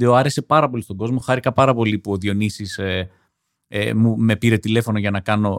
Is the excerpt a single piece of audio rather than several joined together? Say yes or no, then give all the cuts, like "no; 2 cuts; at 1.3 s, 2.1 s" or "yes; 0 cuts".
yes; 0 cuts